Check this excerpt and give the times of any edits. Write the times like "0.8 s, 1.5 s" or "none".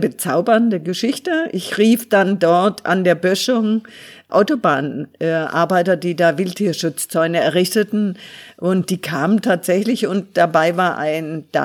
none